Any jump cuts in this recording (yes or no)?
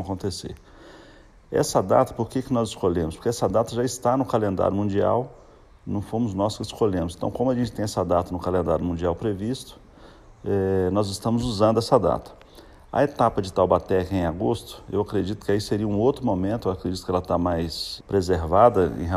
yes